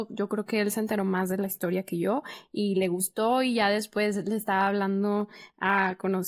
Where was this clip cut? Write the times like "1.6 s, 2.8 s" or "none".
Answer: none